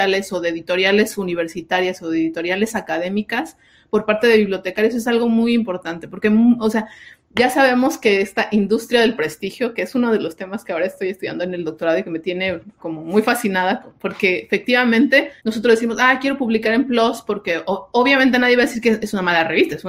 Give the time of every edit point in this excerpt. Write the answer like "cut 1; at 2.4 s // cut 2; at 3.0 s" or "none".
cut 1; at 15.4 s

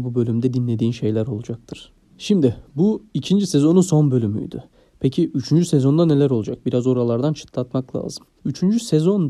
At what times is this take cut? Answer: none

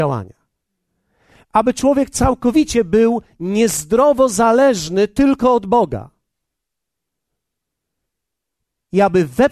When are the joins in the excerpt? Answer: none

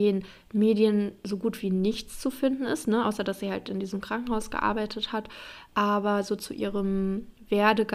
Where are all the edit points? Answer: none

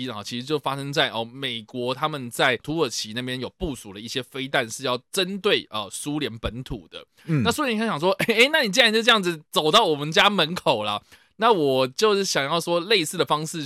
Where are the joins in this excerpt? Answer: none

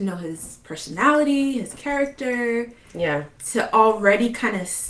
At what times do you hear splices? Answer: none

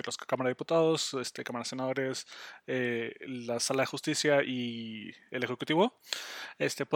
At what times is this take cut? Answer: none

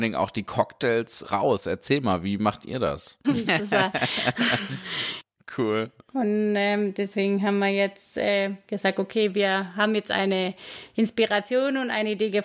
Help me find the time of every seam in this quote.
cut 1; at 1.2 s // cut 2; at 3.2 s

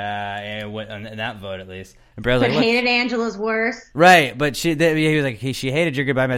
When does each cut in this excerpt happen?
cut 1; at 2.1 s

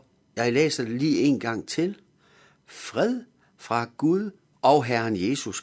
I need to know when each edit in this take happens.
cut 1; at 4.5 s

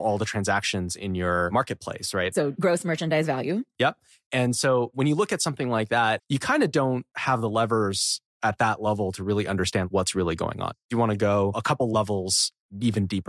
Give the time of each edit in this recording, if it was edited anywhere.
cut 1; at 6.2 s

